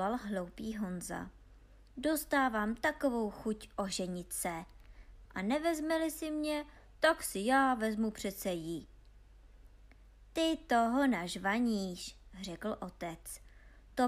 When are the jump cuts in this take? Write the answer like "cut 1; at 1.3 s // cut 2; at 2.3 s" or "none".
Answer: cut 1; at 5.3 s